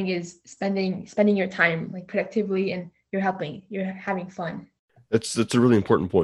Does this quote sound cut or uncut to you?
uncut